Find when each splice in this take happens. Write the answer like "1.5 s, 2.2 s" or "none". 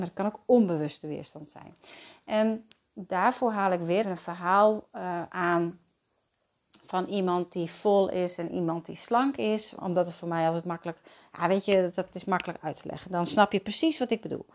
4.0 s, 9.8 s